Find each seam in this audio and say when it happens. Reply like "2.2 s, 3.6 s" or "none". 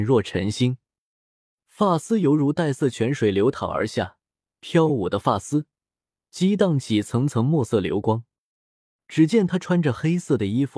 9.0 s